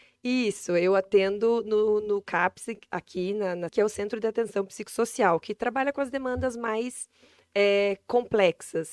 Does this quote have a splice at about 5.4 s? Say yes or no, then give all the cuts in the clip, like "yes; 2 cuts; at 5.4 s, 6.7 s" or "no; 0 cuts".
no; 1 cut; at 3.7 s